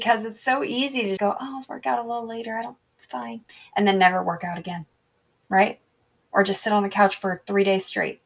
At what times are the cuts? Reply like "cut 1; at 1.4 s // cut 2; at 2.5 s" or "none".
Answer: cut 1; at 1.2 s